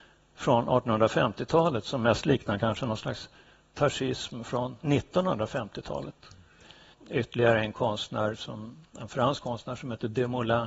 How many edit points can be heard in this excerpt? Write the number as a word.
one